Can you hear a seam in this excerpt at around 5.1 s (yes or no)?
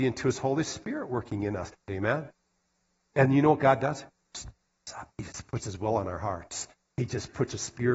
yes